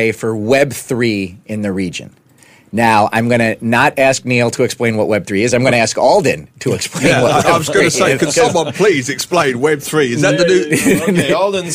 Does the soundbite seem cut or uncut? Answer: uncut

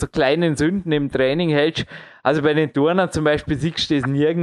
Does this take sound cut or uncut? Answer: uncut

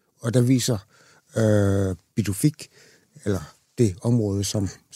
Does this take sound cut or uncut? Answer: uncut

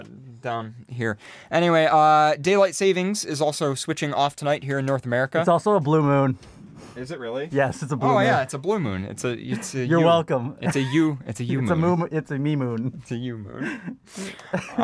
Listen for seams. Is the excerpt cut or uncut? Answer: uncut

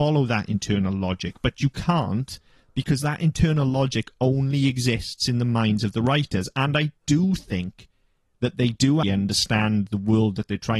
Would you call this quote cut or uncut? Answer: cut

